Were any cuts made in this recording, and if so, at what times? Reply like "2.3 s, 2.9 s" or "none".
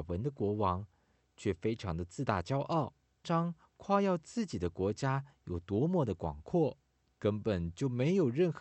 3.2 s, 7.1 s